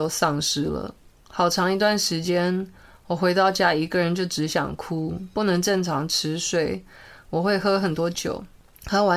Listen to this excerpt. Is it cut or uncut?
uncut